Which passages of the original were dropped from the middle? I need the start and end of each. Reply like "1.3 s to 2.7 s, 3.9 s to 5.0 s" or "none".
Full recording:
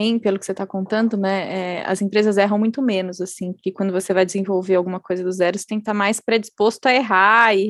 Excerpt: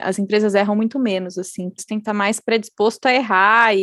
3.6 s to 5.6 s

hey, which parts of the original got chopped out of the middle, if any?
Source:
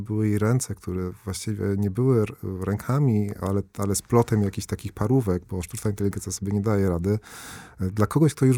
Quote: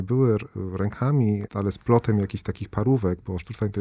3.3 s to 3.7 s

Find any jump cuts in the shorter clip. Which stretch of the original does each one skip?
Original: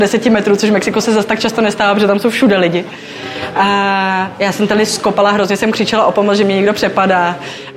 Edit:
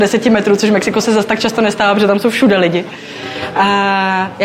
none

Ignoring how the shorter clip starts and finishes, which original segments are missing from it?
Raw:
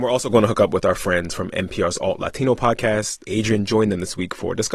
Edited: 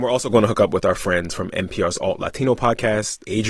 none

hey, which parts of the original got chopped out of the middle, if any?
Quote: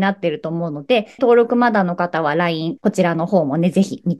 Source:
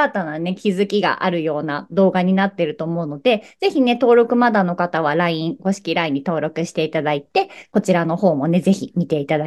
3.5 s to 4.0 s, 5.6 s to 7.7 s

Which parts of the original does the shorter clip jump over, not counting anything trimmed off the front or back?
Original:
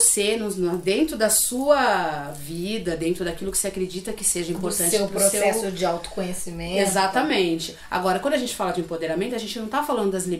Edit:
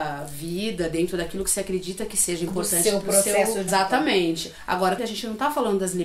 5.7 s to 6.9 s, 8.2 s to 9.3 s

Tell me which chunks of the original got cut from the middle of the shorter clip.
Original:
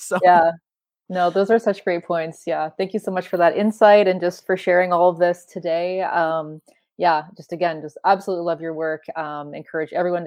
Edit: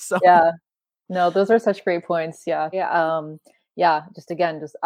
2.7 s to 5.9 s

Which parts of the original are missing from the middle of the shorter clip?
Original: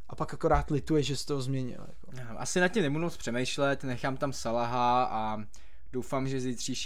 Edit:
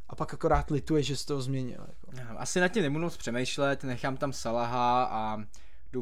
none

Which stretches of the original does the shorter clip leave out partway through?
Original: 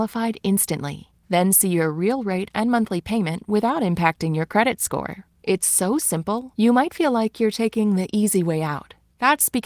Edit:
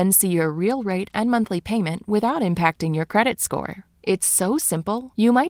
none

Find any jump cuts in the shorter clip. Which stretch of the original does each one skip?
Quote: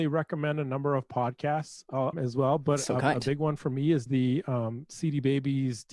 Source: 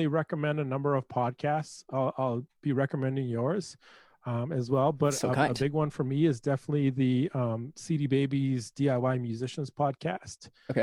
2.1 s to 4.5 s, 6.4 s to 6.9 s

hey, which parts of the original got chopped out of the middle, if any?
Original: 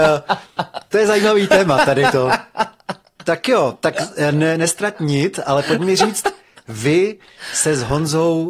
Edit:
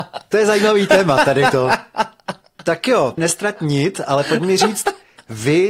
3.8 s to 4.6 s

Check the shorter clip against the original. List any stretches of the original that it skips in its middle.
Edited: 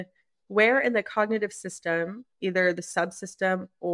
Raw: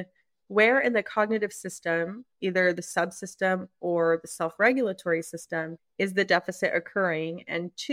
none

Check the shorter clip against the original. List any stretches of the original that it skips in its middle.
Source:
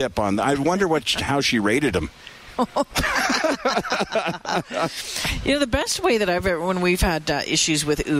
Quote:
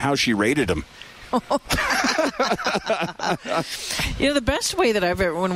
none

